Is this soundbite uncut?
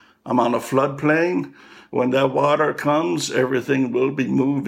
yes; 0 cuts

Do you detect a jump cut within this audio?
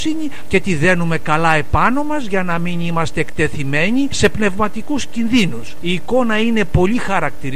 no; 0 cuts

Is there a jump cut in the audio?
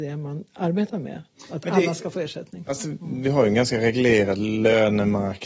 no; 0 cuts

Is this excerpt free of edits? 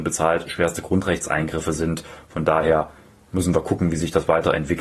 yes; 0 cuts

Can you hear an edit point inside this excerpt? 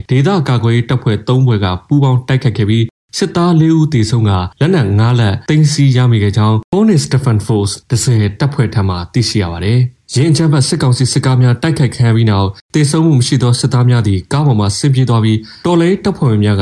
no; 0 cuts

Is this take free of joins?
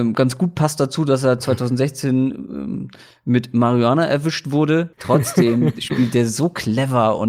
no; 1 cut; at 4.9 s

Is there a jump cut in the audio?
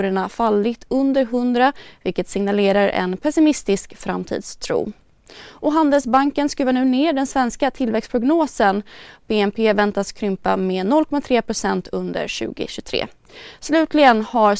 no; 0 cuts

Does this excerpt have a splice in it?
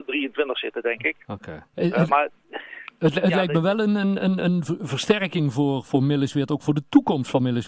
yes; 1 cut; at 1.7 s

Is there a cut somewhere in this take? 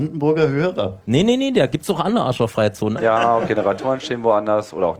yes; 2 cuts; at 1.0 s, 3.0 s

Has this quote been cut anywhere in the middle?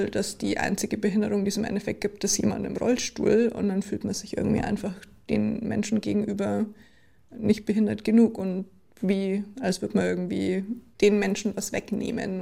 no; 0 cuts

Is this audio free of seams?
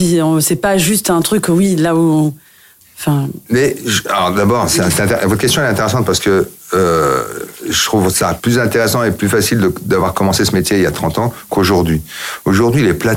yes; 0 cuts

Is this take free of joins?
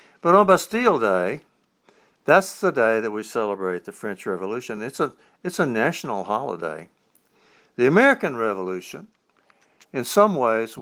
yes; 0 cuts

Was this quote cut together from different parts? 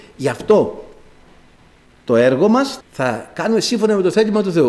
yes; 1 cut; at 2.8 s

